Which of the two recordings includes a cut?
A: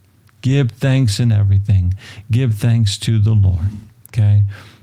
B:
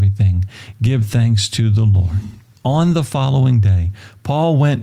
B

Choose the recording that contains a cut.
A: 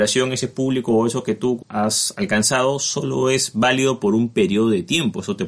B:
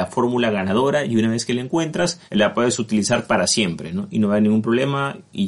B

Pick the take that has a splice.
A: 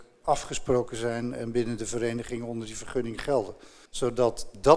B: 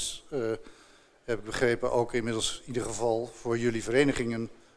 A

